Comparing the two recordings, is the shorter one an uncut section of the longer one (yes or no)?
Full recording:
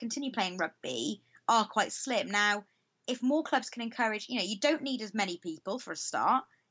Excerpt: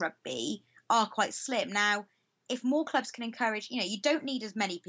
yes